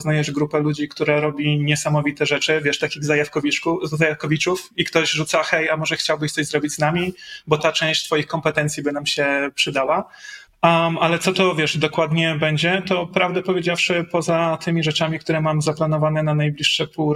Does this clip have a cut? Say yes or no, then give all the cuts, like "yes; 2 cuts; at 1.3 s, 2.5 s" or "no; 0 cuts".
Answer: yes; 1 cut; at 10.5 s